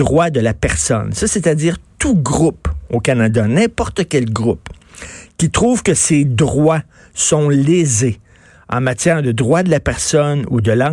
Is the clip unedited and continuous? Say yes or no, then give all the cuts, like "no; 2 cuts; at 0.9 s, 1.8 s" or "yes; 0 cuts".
yes; 0 cuts